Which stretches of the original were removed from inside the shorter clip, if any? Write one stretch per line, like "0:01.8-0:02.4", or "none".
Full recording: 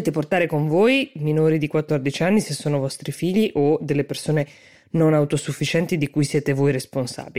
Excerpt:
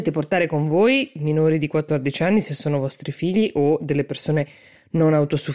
none